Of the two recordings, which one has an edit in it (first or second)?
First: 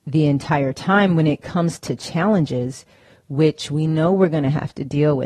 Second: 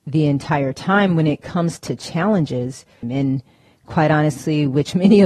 second